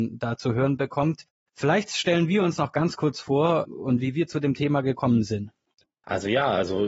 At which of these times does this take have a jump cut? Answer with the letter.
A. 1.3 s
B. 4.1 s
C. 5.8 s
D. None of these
C